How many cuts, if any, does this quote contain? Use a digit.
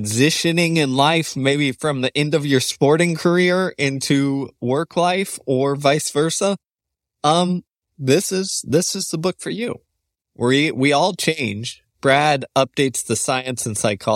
0